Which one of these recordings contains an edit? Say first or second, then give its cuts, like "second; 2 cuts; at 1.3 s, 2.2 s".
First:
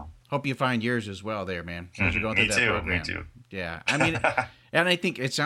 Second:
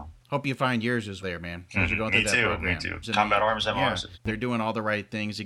second; 3 cuts; at 1.2 s, 3.0 s, 4.1 s